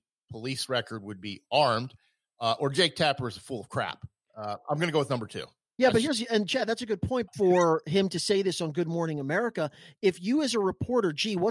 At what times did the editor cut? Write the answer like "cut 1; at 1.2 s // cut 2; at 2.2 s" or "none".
cut 1; at 7.3 s